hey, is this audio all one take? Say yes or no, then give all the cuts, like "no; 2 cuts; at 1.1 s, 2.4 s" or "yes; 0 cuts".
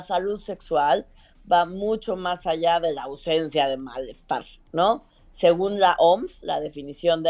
yes; 0 cuts